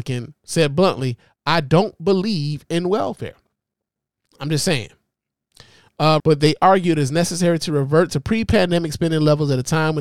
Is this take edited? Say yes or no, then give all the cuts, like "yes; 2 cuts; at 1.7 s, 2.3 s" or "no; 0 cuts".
yes; 2 cuts; at 4.3 s, 6.2 s